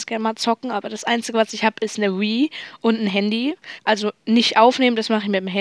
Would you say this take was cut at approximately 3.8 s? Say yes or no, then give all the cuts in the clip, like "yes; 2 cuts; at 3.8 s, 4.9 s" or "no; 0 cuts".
yes; 1 cut; at 3.8 s